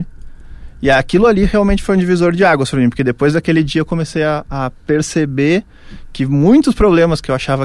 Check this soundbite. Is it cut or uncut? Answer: uncut